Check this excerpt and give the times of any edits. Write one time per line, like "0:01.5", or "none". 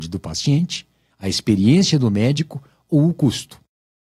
0:01.1